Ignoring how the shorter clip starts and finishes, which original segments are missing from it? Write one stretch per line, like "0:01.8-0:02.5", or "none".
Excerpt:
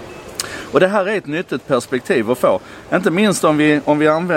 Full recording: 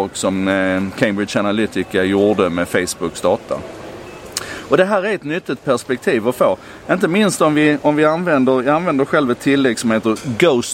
none